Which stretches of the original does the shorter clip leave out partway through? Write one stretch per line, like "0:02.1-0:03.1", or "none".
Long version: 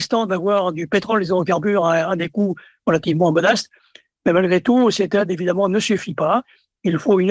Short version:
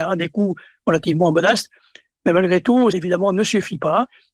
0:04.9-0:05.3